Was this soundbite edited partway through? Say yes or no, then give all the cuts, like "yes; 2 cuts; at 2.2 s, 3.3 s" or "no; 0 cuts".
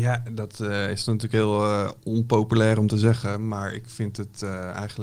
no; 0 cuts